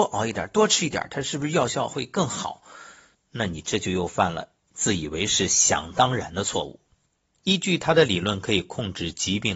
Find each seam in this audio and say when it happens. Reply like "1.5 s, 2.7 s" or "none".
7.3 s